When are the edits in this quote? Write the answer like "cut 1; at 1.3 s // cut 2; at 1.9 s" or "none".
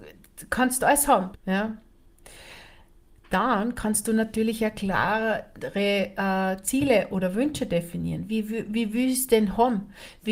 cut 1; at 1.3 s